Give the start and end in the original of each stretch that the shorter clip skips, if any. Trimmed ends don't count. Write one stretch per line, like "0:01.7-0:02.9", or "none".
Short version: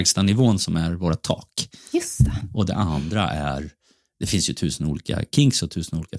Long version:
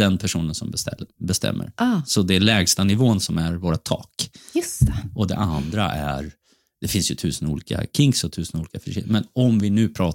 none